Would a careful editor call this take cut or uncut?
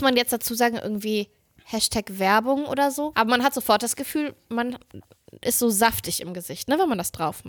cut